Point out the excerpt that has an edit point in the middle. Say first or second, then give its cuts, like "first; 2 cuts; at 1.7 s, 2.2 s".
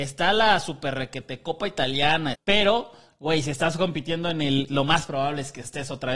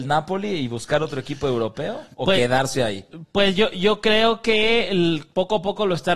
first; 2 cuts; at 2.3 s, 4.7 s